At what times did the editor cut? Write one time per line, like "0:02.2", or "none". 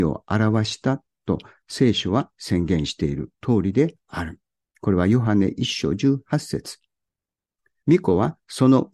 0:07.8